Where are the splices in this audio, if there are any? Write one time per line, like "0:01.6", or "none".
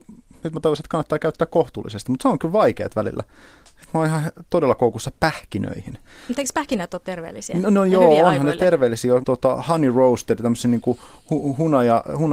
0:09.2